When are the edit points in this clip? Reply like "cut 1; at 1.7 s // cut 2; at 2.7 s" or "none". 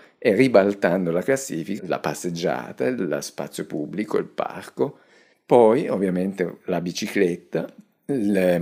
cut 1; at 1.8 s